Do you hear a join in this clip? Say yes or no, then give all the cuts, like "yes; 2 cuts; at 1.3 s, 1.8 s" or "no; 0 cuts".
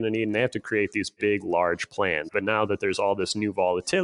yes; 1 cut; at 2.3 s